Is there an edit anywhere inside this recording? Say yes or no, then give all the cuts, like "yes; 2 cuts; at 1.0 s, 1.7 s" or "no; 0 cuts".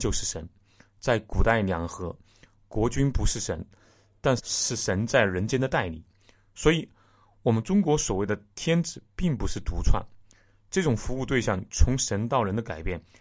yes; 1 cut; at 4.4 s